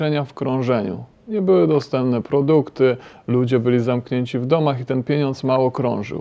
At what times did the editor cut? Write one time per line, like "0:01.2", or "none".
none

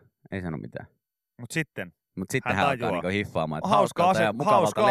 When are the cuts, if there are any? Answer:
0:03.6

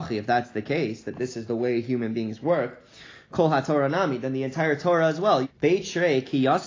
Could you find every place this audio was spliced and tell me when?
0:05.4

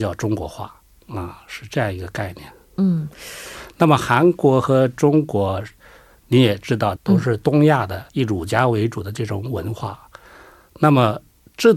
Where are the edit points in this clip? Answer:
0:07.0
0:08.1

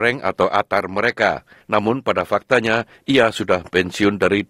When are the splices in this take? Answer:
0:01.6

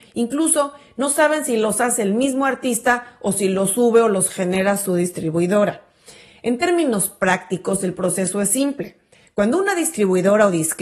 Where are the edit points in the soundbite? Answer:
none

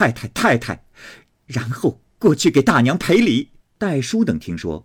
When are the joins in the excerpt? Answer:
0:03.6

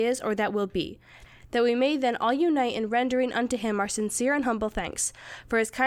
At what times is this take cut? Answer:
none

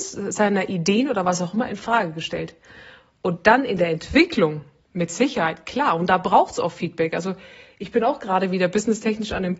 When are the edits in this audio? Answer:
none

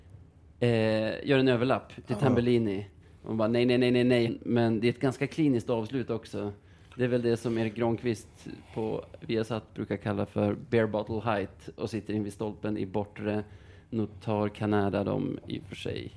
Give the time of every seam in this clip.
0:04.3

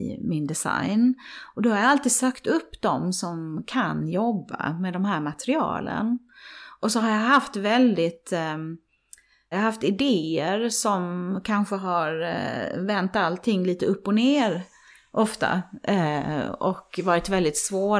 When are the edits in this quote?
0:09.5

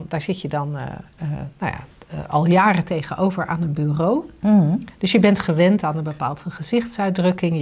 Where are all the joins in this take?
none

